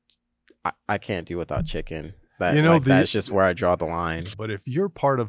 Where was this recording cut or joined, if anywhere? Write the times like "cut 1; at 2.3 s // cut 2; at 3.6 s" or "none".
cut 1; at 4.3 s